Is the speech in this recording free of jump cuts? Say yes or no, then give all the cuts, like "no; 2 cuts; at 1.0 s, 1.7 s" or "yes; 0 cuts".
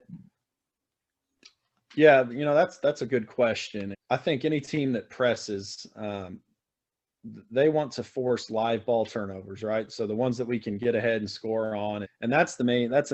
no; 2 cuts; at 3.9 s, 12.0 s